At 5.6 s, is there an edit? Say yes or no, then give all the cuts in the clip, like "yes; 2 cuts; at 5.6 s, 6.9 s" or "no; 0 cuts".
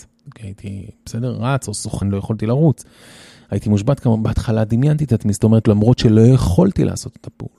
yes; 2 cuts; at 2.0 s, 5.6 s